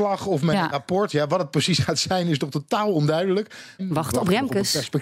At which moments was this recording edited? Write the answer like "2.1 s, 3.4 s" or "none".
3.8 s